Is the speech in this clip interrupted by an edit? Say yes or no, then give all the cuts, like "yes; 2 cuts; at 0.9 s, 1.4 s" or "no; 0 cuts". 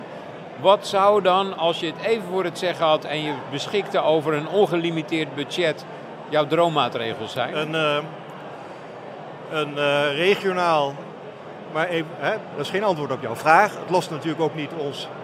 yes; 1 cut; at 12.5 s